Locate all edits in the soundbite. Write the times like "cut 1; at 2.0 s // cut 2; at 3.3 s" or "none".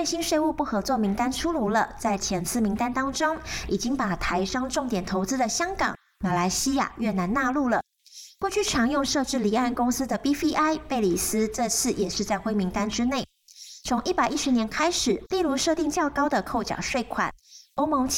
cut 1; at 15.2 s